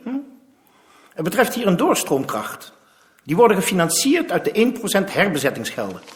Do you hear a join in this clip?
no; 0 cuts

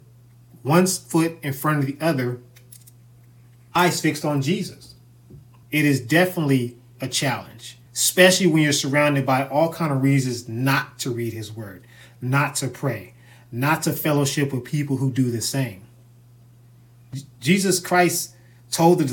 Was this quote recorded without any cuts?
no; 2 cuts; at 5.6 s, 7.9 s

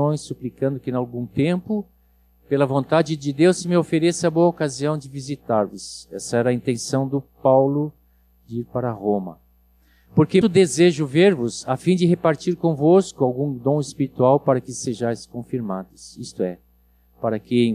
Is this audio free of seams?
no; 1 cut; at 10.4 s

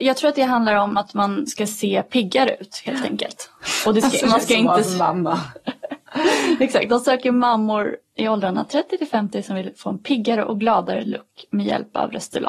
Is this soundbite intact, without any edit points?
yes; 0 cuts

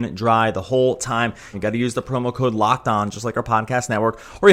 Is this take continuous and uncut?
no; 1 cut; at 1.5 s

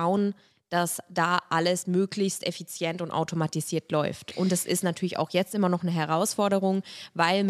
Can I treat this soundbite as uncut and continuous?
yes; 0 cuts

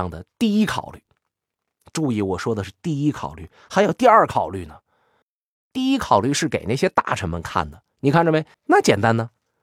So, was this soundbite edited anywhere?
yes; 1 cut; at 8.5 s

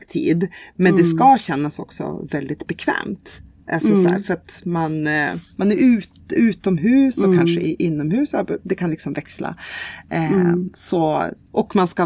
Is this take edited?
no; 0 cuts

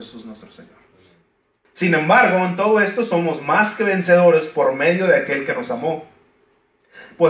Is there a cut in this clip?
yes; 1 cut; at 1.6 s

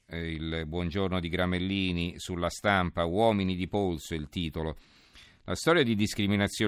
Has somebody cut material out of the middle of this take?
no; 0 cuts

